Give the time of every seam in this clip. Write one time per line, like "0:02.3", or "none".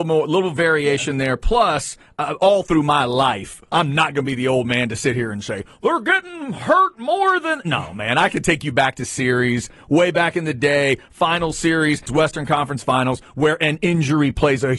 0:12.1